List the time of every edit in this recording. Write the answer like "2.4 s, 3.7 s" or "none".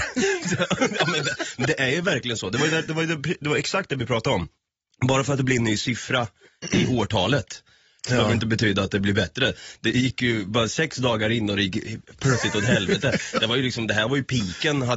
none